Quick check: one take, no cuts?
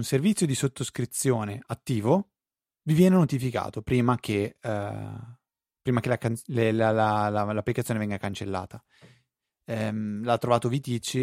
yes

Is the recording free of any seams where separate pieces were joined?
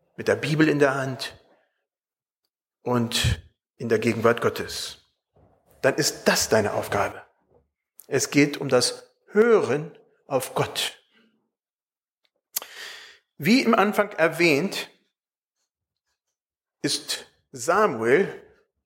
yes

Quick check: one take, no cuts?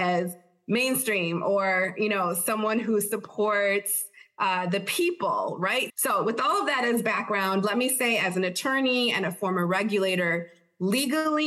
no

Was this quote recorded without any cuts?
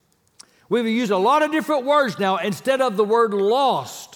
yes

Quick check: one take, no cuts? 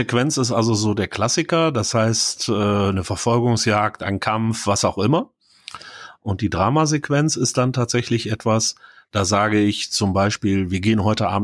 yes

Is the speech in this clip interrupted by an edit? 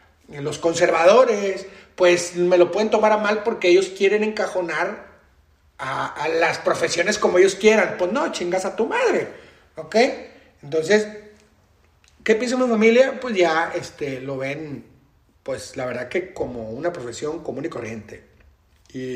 no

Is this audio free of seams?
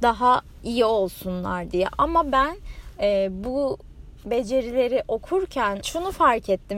no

